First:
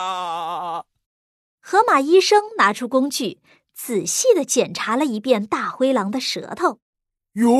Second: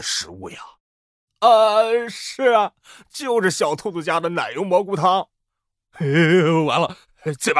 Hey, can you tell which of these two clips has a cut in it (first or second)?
second